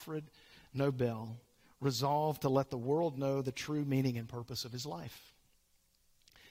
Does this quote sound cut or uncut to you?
uncut